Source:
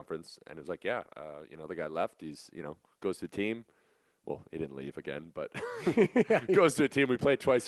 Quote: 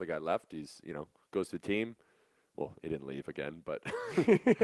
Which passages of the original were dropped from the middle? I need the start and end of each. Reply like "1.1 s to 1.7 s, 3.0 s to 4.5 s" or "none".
none

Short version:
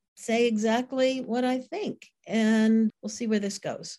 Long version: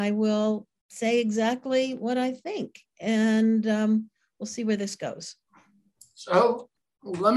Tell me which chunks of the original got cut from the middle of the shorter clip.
3.6 s to 4.3 s

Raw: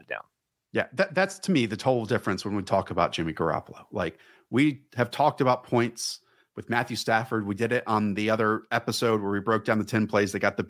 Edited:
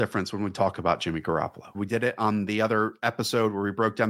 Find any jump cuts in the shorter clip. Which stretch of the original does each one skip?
3.9 s to 7.4 s

